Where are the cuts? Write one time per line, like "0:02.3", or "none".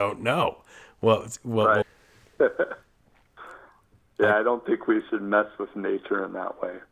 0:01.8

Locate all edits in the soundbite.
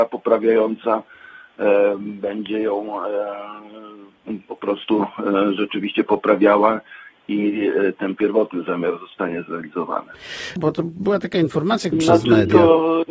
0:10.6
0:11.9

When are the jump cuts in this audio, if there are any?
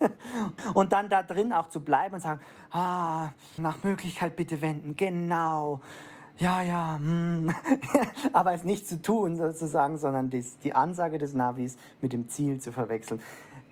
0:03.6

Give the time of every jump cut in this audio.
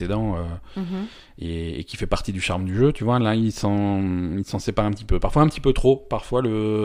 none

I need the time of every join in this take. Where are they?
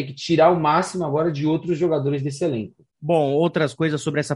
0:02.9

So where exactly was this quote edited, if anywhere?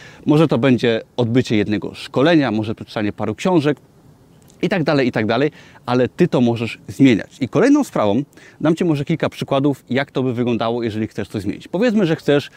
none

